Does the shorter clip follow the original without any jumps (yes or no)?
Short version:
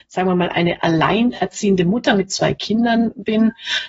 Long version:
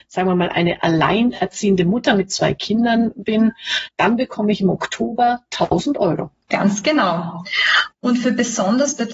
yes